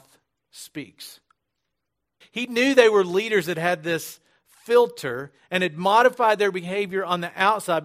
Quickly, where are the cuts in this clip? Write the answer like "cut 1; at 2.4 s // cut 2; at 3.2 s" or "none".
cut 1; at 2.2 s